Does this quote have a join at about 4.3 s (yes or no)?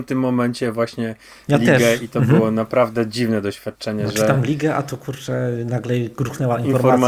no